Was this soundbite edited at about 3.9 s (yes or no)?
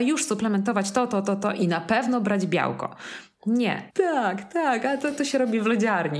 yes